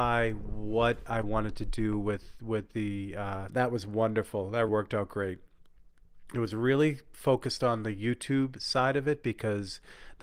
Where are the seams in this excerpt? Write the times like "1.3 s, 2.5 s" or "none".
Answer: 3.5 s, 4.7 s